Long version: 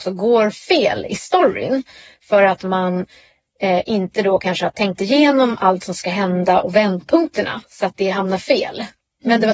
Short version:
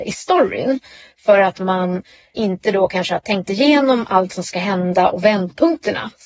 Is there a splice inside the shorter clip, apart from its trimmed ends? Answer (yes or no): yes